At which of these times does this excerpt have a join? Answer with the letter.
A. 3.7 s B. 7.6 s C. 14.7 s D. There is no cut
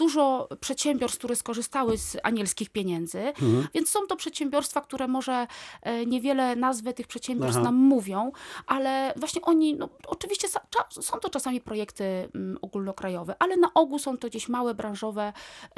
A